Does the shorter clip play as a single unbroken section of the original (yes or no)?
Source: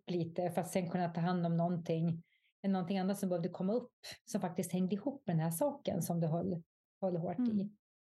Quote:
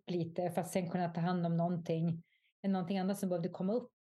yes